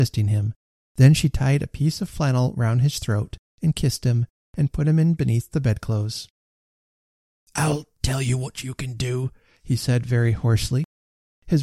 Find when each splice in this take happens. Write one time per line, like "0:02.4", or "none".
none